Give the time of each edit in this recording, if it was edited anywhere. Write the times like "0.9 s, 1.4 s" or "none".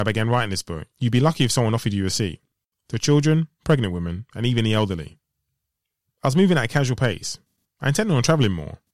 none